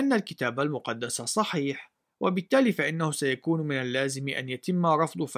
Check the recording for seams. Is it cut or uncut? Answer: uncut